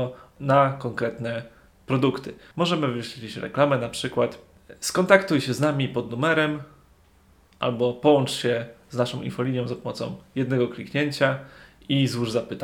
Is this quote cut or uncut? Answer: cut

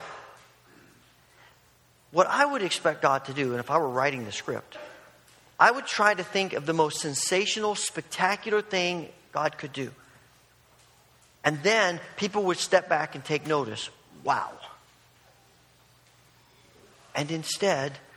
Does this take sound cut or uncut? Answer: uncut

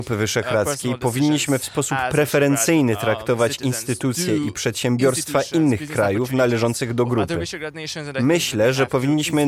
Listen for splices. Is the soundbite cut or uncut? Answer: uncut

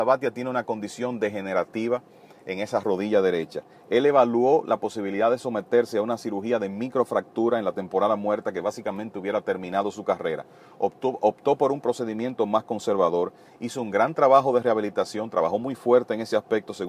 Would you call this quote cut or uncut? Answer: uncut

